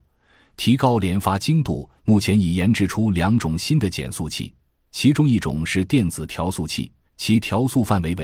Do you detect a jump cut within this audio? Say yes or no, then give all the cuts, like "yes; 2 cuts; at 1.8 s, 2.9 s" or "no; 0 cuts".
yes; 2 cuts; at 2.0 s, 7.1 s